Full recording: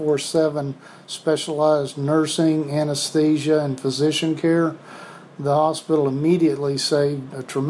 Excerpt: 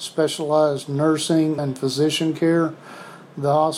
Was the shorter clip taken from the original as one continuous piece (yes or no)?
no